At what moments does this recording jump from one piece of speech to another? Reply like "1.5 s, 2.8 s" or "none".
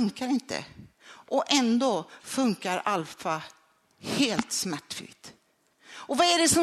5.7 s